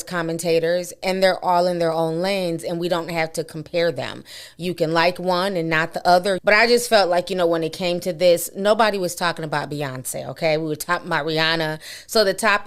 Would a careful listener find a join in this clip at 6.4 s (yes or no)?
yes